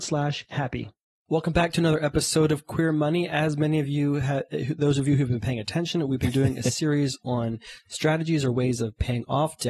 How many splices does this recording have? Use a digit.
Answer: 0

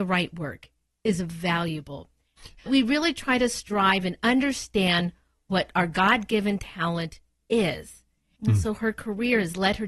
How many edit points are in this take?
2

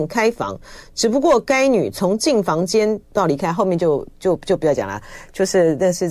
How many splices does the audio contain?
1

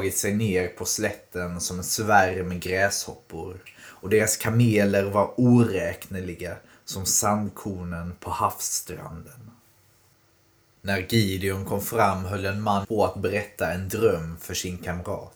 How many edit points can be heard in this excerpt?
1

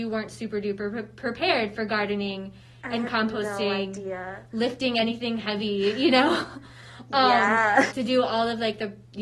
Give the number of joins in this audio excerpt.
1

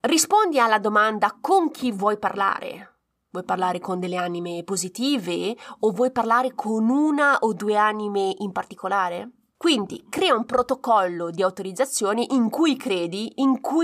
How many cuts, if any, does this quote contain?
1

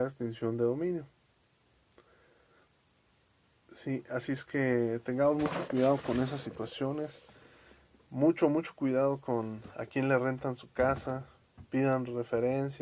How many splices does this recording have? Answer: 0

